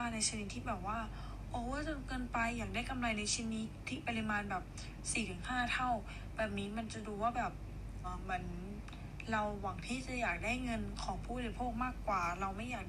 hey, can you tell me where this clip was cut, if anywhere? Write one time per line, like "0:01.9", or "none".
0:08.0